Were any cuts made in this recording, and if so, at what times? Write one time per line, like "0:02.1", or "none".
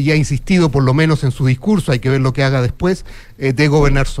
none